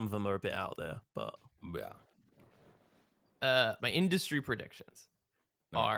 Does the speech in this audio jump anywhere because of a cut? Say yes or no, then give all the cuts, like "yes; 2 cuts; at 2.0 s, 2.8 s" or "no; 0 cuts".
yes; 1 cut; at 3.8 s